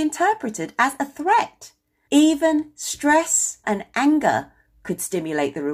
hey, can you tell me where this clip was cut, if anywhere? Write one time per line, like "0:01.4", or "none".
0:02.1
0:03.6

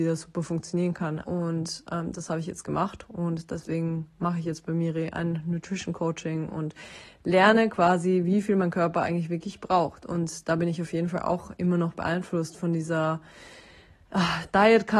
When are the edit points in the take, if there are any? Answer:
0:01.2

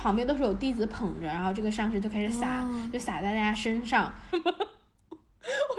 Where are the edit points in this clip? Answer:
0:04.3

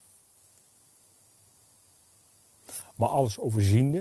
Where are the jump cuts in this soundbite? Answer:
none

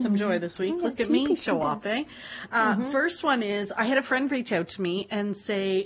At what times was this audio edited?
none

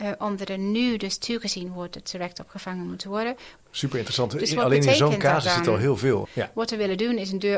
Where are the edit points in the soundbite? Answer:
0:03.6
0:06.2

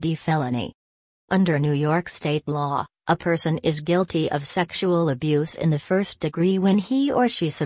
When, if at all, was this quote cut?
0:01.2

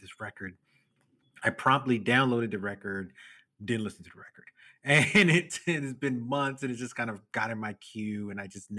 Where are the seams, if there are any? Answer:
none

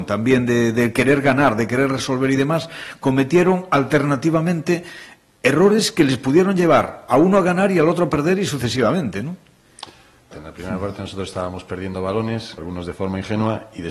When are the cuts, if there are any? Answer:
0:10.3
0:12.6

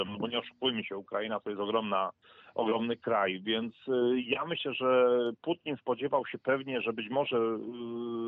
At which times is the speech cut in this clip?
none

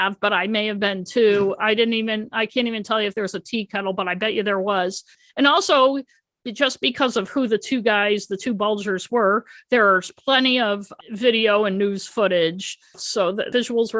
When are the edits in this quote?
none

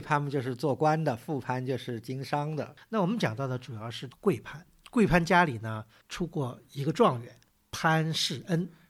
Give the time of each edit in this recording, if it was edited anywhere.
none

